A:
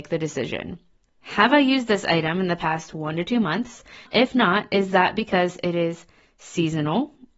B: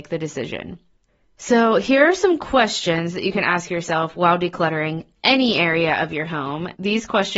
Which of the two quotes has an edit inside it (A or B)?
A